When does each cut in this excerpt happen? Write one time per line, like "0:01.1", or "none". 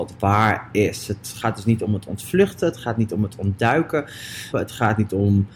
0:04.5